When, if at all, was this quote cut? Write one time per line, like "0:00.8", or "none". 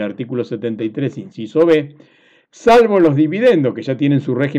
none